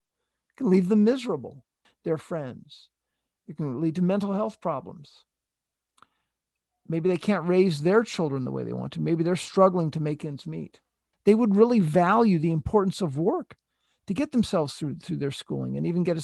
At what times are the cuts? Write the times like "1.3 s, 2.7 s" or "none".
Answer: 1.8 s, 11.1 s